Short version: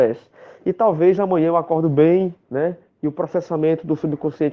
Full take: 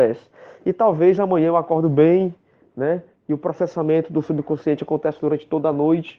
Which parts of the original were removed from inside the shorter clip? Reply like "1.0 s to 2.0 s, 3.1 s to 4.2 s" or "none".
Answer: 2.4 s to 2.7 s